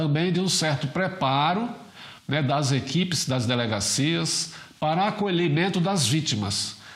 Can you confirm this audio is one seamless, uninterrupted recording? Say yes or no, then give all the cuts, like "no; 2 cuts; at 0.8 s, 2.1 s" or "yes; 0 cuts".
yes; 0 cuts